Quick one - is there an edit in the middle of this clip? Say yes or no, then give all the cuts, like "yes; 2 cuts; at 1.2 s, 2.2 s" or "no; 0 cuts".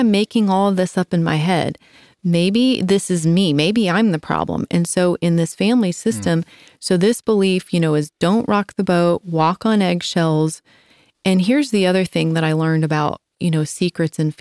yes; 1 cut; at 6.7 s